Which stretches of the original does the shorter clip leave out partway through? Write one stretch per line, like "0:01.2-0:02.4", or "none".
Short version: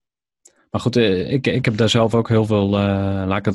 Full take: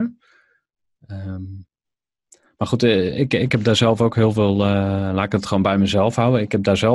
none

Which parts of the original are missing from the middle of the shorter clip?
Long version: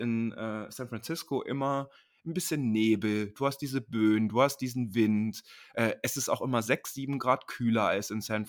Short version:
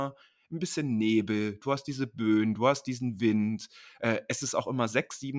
none

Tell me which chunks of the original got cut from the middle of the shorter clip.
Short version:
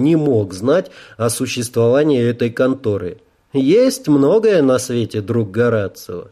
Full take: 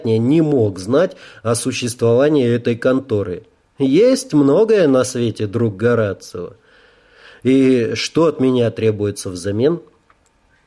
none

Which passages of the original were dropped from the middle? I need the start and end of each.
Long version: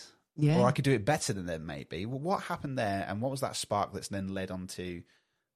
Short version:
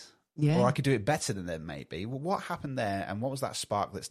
none

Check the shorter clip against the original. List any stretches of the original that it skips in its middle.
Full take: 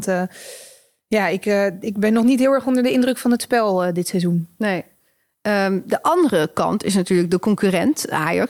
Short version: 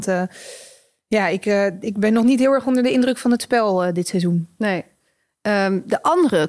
none

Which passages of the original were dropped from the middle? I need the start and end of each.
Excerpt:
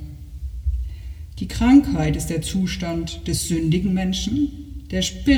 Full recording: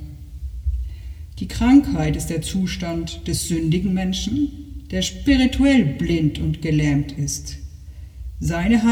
none

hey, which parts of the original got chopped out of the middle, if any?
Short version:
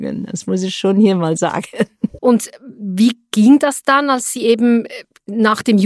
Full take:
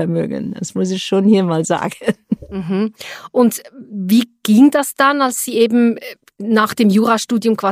0:02.5-0:03.3

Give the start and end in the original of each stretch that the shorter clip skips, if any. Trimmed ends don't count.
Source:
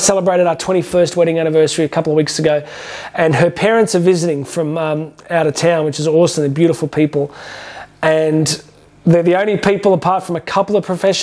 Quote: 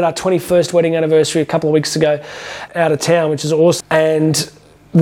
0:03.1-0:05.2
0:06.4-0:07.9

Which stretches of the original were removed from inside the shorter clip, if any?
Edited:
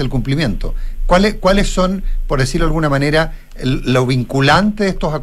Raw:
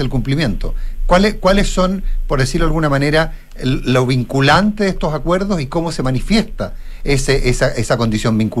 none

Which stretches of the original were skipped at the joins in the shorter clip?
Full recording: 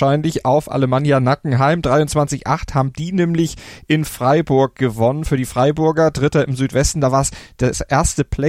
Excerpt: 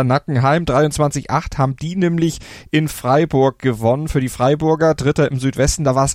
none

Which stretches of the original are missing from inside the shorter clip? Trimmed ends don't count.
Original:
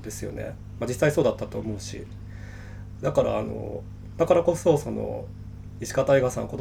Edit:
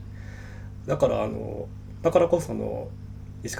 0:04.6-0:04.8

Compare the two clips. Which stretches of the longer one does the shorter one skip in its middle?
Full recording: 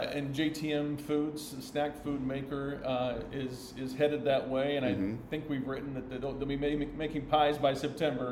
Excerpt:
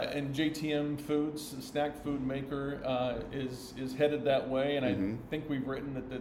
none

